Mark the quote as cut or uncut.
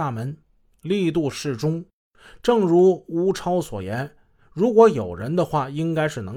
uncut